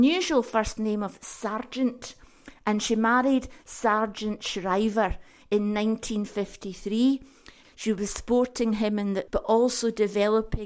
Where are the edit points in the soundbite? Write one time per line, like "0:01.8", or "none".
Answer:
0:07.6
0:09.3